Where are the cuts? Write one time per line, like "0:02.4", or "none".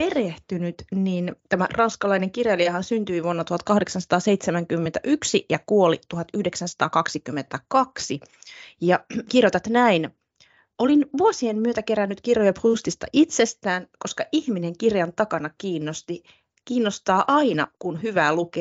none